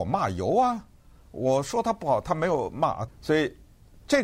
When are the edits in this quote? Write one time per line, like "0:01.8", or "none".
0:03.1